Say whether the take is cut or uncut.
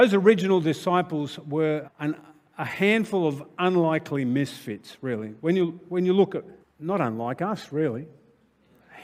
cut